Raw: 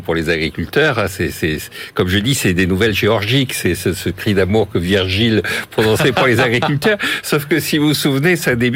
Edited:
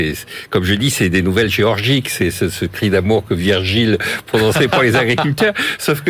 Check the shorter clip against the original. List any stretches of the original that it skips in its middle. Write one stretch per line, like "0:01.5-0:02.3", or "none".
none